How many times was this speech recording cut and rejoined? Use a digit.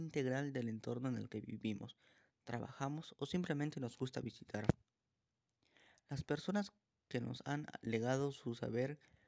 0